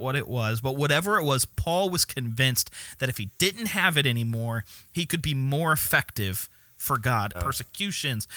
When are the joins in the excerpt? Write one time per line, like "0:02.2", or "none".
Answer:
0:07.3